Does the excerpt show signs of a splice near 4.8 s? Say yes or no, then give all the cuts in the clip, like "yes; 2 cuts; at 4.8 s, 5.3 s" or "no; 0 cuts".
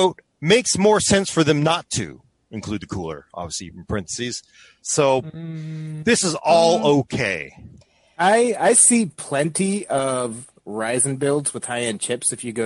yes; 1 cut; at 4.8 s